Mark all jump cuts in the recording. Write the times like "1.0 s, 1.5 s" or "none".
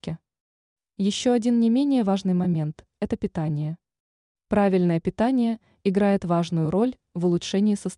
none